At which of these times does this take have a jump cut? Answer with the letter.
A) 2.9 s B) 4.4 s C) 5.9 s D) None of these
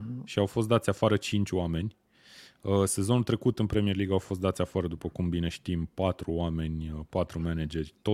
D